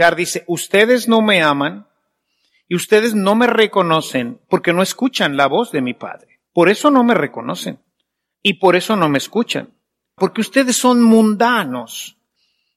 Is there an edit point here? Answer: yes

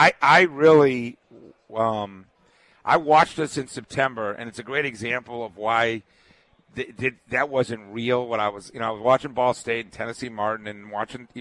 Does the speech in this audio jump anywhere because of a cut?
no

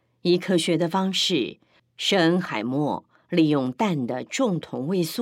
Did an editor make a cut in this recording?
yes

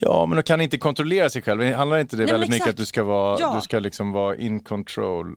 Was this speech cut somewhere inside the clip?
no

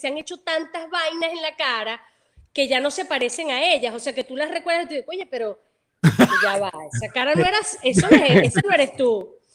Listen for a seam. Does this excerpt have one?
no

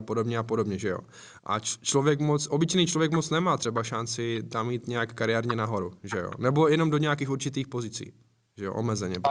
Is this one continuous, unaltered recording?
yes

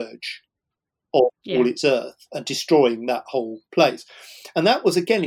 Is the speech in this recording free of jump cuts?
yes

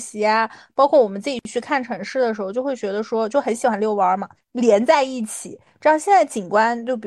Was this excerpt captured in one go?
no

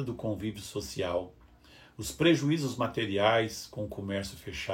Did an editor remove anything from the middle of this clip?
no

